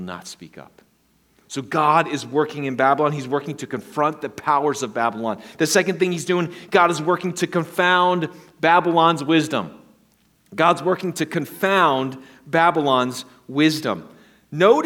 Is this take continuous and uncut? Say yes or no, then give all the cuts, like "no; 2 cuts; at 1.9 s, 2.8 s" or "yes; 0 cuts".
yes; 0 cuts